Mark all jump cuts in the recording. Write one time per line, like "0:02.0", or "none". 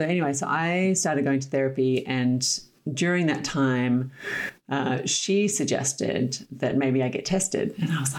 none